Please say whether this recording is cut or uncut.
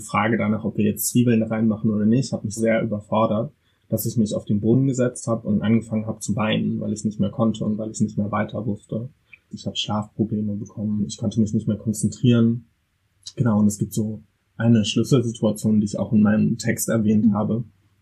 cut